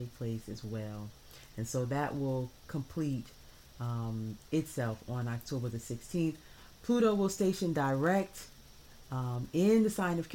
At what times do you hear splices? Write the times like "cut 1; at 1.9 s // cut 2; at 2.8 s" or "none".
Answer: none